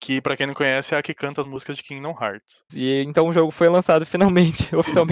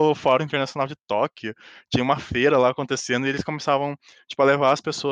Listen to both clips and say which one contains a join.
first; 1 cut; at 2.7 s

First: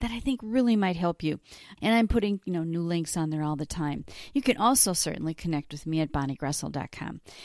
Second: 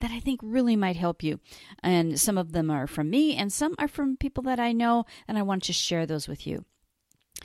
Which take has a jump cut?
first; 1 cut; at 1.8 s

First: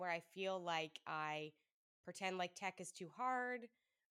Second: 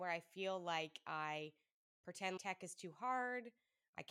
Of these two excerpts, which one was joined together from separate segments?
second; 1 cut; at 2.4 s

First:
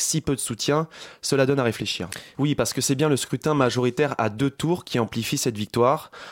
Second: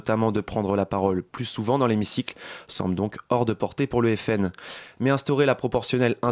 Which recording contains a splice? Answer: first; 1 cut; at 2.3 s

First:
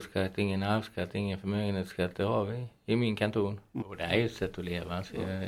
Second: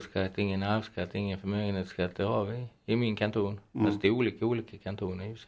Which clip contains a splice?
first; 1 cut; at 3.8 s

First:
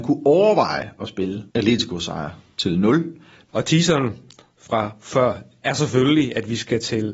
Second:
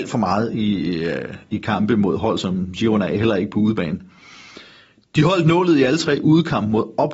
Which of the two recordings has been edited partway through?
first; 2 cuts; at 1.5 s, 3.5 s

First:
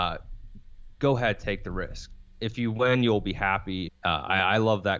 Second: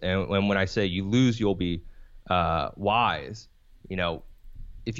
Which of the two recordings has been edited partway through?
first; 1 cut; at 3.9 s

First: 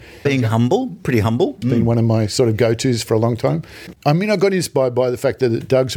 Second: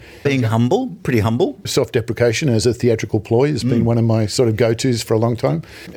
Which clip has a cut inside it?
first; 2 cuts; at 1.6 s, 3.9 s

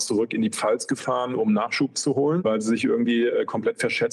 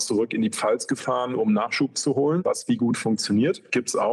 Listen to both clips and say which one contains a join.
second; 1 cut; at 2.4 s

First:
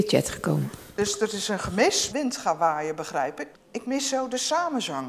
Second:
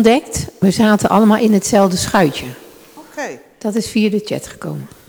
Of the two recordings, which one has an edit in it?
first; 2 cuts; at 2.1 s, 3.5 s

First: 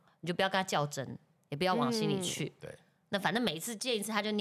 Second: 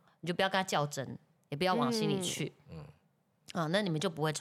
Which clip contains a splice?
first; 1 cut; at 2.6 s

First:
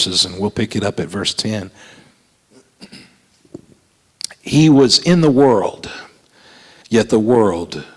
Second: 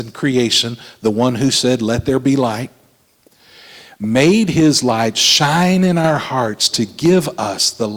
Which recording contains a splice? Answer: first; 1 cut; at 6.8 s

